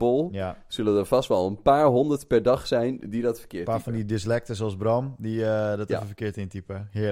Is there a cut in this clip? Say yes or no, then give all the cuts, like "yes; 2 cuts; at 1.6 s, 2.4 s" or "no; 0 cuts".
no; 0 cuts